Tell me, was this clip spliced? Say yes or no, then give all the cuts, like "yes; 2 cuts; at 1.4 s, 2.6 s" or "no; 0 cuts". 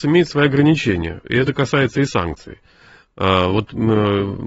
no; 0 cuts